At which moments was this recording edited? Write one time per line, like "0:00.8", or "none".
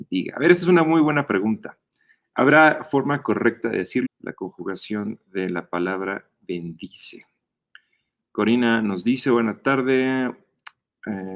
0:04.0